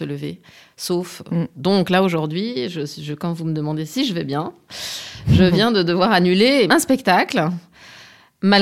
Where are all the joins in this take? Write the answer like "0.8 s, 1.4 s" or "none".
1.5 s, 6.7 s